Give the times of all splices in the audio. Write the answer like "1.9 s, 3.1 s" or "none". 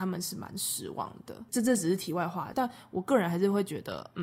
2.5 s

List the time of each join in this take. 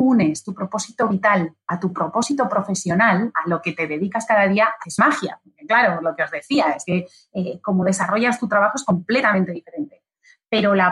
none

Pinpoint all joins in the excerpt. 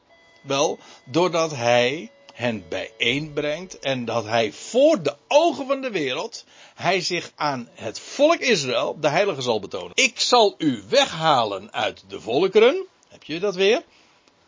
9.9 s

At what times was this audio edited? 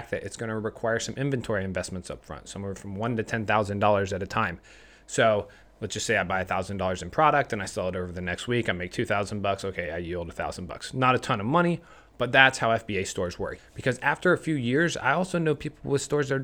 13.6 s

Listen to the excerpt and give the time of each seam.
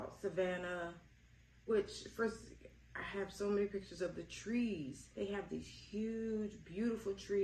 5.1 s

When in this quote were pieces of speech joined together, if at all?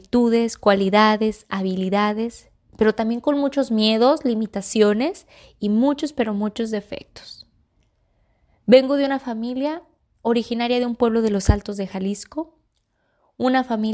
none

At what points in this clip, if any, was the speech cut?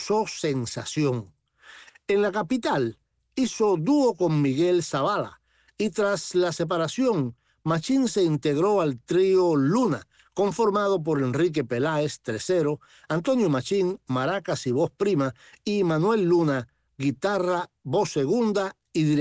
1.9 s

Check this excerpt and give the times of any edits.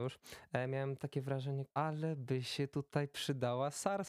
1.7 s

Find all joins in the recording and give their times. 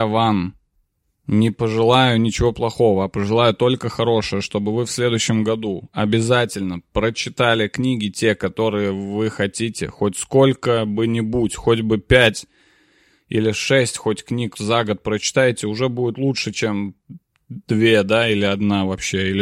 14.5 s

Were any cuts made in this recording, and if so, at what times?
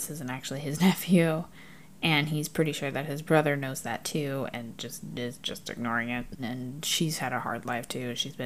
6.4 s

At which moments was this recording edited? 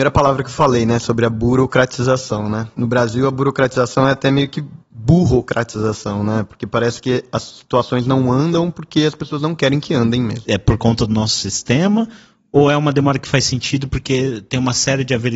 10.5 s

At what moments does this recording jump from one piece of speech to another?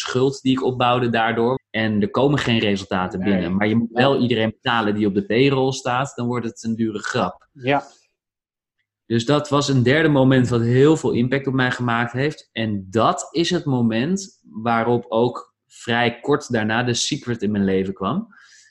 1.6 s

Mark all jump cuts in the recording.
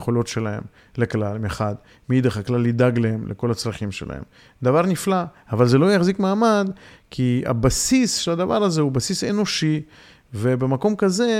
none

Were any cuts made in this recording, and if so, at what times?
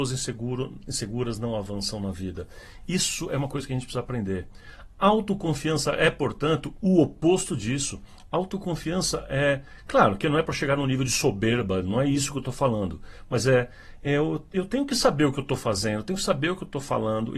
none

